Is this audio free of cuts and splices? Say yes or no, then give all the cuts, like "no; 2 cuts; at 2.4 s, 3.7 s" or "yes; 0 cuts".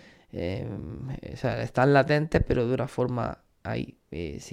yes; 0 cuts